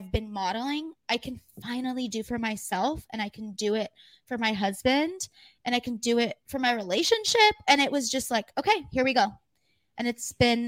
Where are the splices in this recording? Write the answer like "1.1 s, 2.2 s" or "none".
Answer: none